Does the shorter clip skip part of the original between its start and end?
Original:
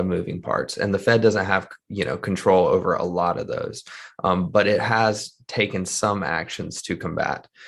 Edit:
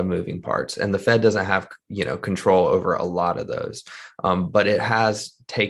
no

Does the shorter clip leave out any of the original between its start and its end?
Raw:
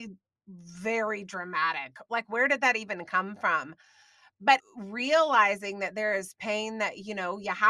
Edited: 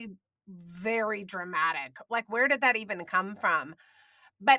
no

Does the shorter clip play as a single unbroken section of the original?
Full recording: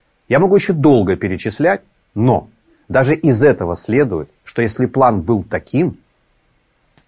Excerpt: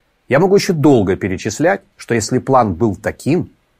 no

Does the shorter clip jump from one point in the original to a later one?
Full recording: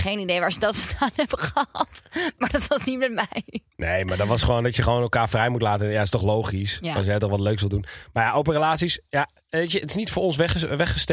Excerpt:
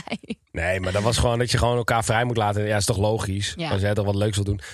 no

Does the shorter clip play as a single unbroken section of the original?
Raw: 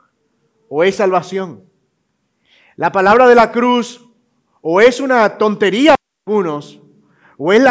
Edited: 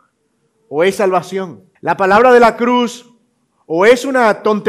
no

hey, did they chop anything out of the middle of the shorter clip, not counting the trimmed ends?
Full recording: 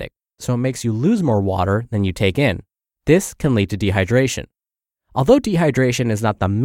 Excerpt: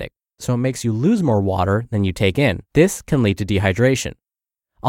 yes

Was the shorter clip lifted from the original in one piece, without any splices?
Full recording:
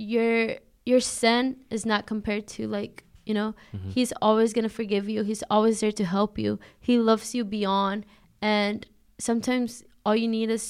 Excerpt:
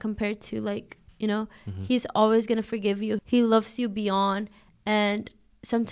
no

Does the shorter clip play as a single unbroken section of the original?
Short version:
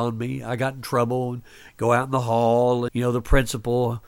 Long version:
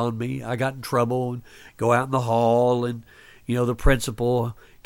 no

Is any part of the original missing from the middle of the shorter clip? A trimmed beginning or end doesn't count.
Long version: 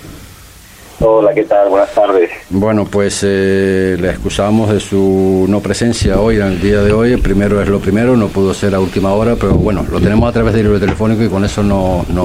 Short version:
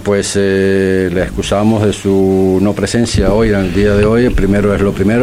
no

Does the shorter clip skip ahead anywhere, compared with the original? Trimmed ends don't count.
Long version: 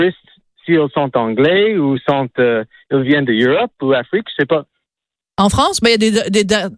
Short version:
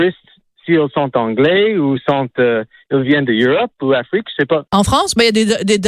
yes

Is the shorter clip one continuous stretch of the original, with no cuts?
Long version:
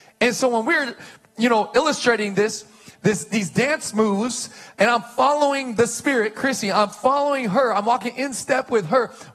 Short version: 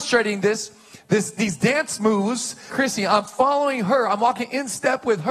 no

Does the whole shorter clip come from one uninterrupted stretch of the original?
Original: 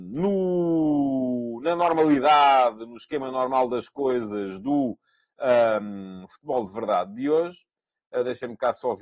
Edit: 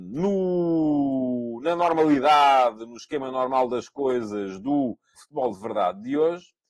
no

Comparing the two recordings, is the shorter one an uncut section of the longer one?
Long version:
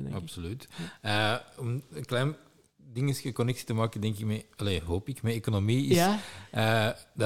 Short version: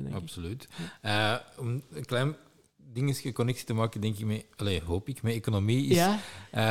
yes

